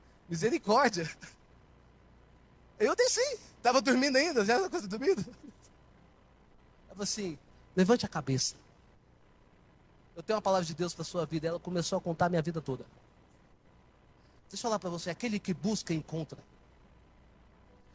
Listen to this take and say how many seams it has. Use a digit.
0